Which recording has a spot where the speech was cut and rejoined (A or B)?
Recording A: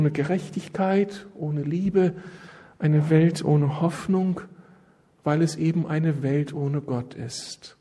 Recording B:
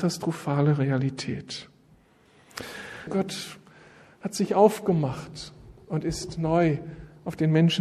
B